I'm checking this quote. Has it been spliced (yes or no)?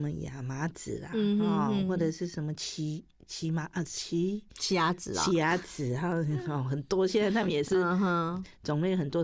no